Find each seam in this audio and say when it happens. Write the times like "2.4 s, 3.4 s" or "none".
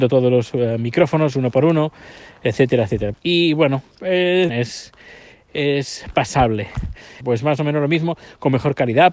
3.1 s, 4.5 s, 7.2 s